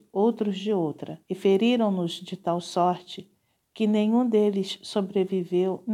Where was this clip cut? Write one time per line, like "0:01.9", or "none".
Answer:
0:01.2

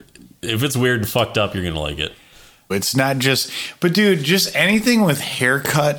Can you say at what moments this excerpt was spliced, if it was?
0:02.7

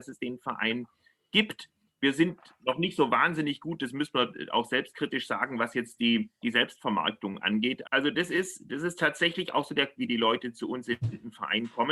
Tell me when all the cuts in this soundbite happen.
0:07.8
0:10.0

